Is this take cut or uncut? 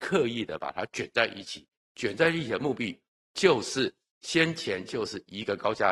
uncut